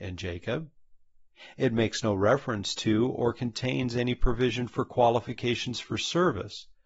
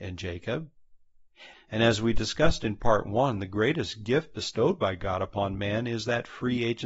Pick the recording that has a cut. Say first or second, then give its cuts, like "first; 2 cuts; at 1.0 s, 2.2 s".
second; 1 cut; at 1.5 s